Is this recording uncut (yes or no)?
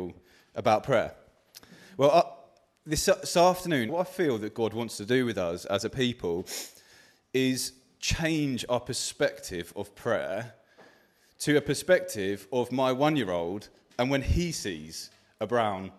no